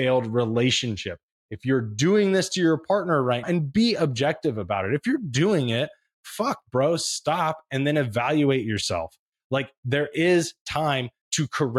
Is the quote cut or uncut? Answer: cut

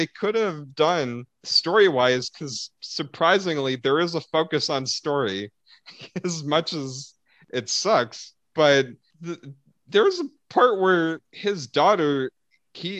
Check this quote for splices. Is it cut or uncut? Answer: cut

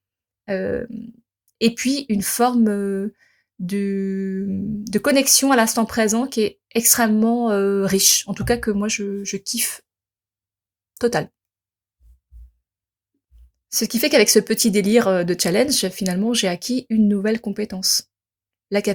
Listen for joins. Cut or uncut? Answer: cut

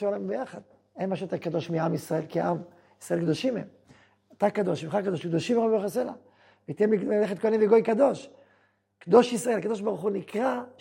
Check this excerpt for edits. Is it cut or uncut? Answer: uncut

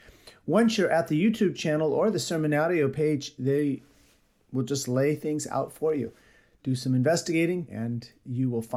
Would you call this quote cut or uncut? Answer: cut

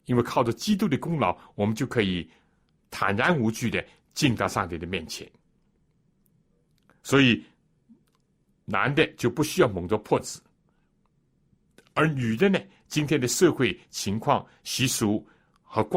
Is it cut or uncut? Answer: uncut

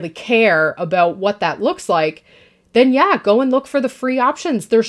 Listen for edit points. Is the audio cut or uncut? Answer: uncut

